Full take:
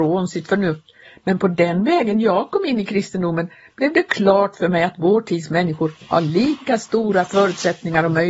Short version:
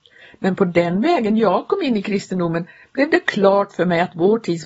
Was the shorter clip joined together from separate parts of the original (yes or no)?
no